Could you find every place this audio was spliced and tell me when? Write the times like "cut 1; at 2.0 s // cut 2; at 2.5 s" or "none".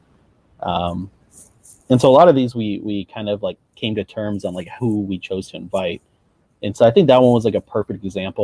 none